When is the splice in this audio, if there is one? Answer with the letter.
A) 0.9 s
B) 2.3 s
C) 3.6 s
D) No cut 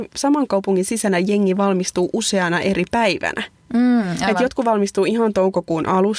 D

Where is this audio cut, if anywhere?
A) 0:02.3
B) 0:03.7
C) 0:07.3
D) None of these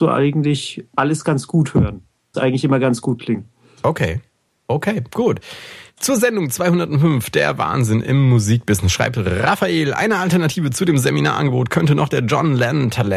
A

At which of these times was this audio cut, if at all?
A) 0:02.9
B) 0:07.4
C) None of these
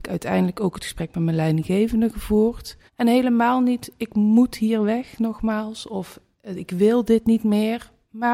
A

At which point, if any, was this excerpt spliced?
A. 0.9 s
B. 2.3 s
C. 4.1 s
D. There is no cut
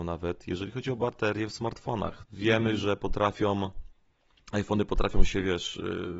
B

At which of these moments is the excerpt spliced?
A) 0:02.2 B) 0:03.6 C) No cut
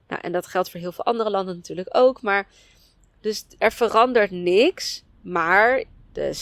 B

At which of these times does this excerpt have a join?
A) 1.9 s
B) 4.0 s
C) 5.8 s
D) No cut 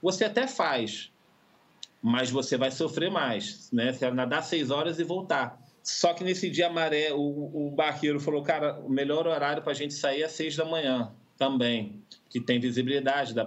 B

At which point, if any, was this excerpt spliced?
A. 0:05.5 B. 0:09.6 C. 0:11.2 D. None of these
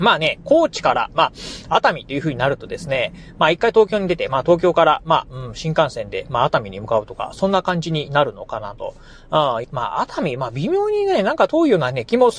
B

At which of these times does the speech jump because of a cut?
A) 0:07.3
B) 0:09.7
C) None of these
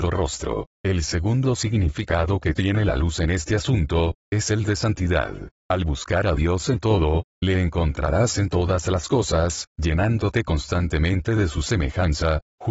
B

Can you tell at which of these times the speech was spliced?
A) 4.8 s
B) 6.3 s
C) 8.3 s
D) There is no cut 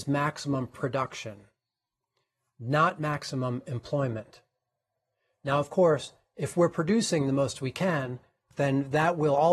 D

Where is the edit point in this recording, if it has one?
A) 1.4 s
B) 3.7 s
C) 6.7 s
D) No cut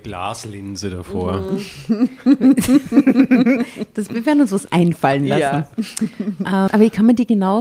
C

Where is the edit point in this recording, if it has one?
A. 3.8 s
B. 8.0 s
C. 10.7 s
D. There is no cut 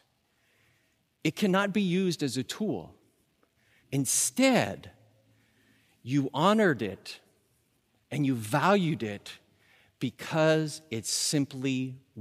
A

